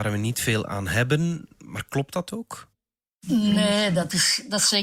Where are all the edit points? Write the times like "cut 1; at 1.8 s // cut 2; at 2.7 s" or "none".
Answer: none